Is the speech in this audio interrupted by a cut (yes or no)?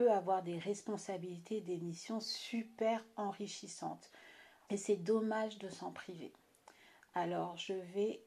yes